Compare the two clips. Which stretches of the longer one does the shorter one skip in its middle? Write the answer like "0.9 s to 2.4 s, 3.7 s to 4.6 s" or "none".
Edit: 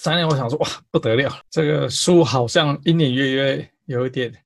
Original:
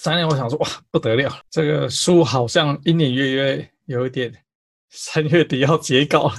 none